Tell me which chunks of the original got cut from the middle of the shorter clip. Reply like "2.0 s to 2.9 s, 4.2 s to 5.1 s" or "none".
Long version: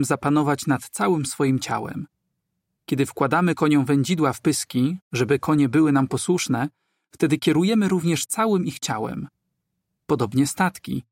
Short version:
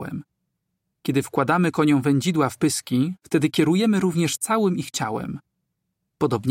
5.0 s to 7.1 s

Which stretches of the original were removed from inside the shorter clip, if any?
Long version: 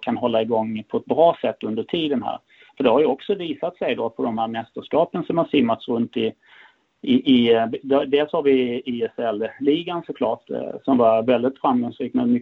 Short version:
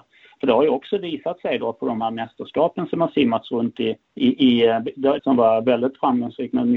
6.4 s to 6.9 s, 8.1 s to 10.8 s

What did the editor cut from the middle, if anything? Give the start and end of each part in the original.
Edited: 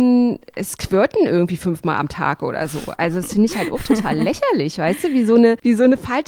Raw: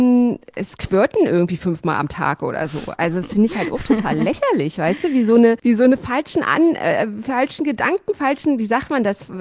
none

